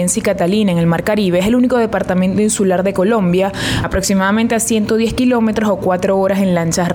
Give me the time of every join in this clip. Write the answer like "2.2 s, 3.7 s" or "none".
3.8 s